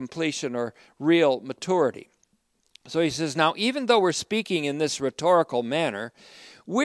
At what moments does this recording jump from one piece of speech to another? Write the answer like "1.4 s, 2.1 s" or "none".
none